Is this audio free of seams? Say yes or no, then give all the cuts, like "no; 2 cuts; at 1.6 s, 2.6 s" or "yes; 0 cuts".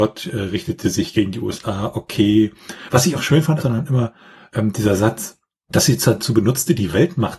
no; 1 cut; at 3.6 s